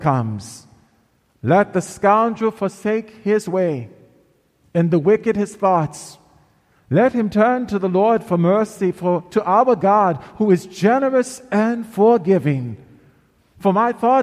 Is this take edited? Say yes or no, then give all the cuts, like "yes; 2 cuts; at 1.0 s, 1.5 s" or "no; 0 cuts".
no; 0 cuts